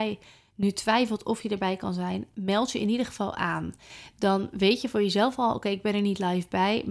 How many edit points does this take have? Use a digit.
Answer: 0